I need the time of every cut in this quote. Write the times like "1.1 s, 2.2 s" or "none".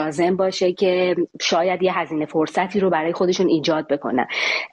1.3 s